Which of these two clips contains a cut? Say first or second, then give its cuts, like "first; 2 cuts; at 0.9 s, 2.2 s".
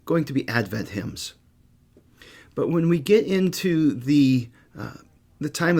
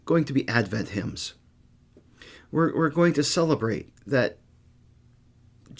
second; 2 cuts; at 2.3 s, 4.0 s